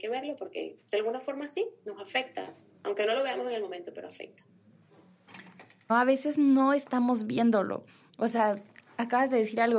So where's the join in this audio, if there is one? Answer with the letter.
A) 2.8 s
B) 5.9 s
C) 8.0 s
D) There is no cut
B